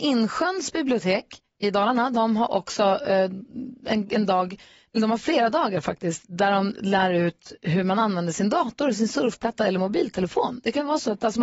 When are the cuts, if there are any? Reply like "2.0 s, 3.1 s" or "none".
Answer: none